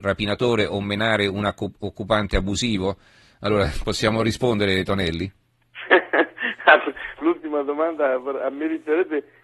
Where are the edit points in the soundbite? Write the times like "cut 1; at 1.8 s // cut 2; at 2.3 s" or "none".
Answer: none

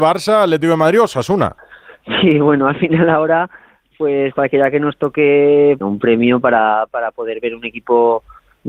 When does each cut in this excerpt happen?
cut 1; at 5.8 s // cut 2; at 6.9 s

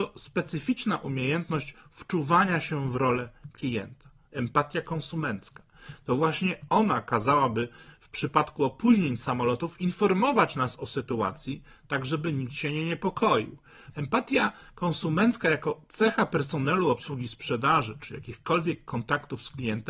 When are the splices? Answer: cut 1; at 13.9 s // cut 2; at 18.0 s

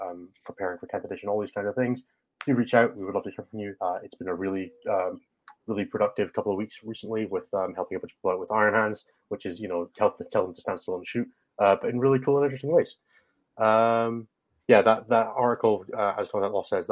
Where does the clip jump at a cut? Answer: cut 1; at 3.8 s

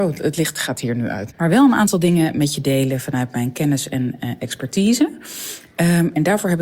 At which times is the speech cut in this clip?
cut 1; at 1.3 s

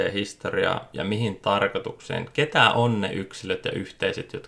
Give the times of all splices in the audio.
none

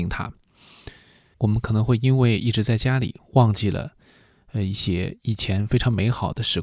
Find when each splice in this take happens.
cut 1; at 1.3 s

